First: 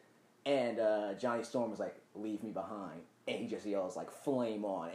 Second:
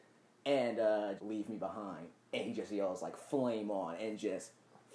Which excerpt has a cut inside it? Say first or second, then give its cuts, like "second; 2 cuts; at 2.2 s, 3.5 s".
second; 1 cut; at 1.2 s